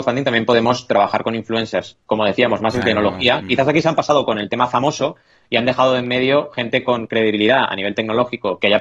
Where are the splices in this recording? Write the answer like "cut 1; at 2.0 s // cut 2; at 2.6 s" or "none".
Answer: none